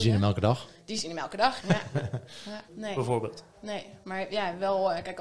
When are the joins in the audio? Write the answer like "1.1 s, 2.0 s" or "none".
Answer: 1.6 s, 2.7 s